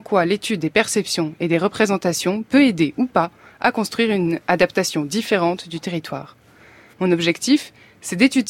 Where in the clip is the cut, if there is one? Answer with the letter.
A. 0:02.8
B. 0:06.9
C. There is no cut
B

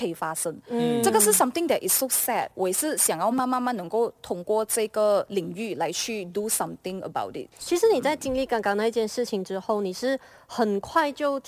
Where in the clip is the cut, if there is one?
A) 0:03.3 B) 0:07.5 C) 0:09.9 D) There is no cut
A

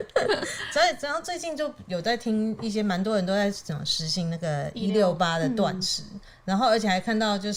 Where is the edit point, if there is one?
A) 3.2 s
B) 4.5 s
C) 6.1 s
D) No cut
D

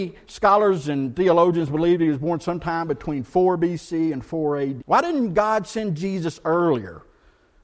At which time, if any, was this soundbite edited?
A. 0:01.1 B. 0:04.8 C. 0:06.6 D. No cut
B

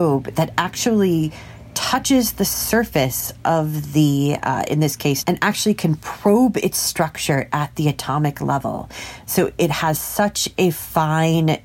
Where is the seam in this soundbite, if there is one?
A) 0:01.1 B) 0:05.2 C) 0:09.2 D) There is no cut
B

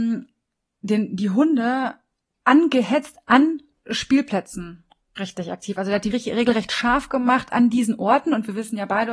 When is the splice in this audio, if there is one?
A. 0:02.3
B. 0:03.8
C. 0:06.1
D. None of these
C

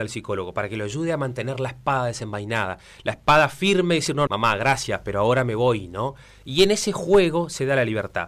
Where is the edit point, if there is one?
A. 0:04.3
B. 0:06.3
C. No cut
A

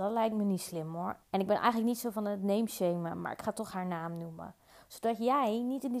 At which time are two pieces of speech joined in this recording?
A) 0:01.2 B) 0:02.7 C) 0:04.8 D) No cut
A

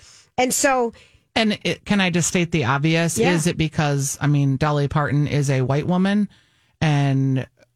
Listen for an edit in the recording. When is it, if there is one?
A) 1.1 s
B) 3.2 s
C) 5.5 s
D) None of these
D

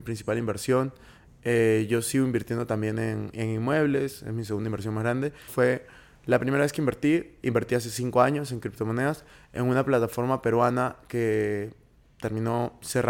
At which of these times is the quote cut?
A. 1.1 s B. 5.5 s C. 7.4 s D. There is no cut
B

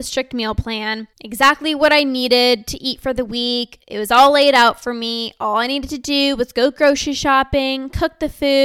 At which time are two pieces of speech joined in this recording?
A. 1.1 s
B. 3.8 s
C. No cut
A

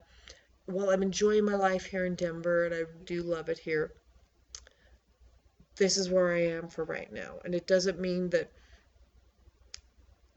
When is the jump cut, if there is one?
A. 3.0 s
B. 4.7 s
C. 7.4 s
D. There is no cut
A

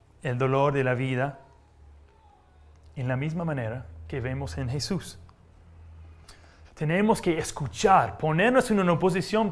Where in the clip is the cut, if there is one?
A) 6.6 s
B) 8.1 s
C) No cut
A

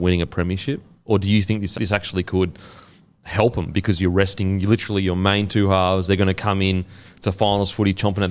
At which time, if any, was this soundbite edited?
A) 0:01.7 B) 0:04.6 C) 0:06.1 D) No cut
A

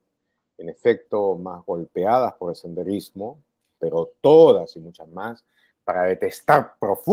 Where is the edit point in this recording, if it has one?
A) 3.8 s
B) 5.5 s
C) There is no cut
A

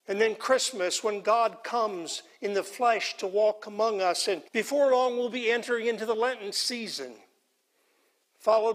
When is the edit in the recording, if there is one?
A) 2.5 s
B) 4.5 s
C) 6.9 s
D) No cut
B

